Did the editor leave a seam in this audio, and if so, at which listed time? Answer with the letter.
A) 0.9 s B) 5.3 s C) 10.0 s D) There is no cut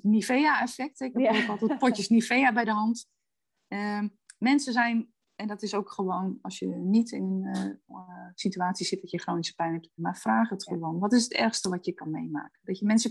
C